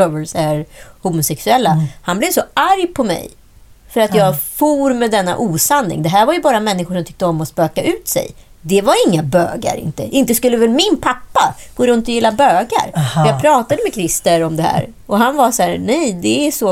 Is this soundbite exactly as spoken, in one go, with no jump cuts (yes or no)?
yes